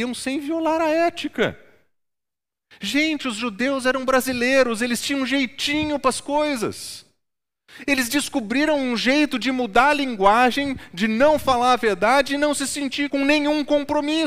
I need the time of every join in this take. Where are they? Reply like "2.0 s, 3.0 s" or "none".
13.1 s